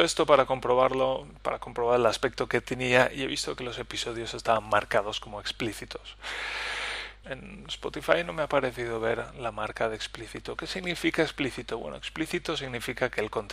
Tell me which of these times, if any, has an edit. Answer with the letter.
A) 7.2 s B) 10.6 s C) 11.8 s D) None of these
A